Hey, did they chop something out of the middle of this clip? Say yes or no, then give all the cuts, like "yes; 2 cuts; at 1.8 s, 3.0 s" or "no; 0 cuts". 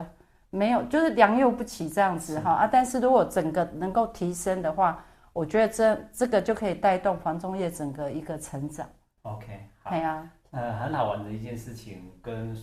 no; 0 cuts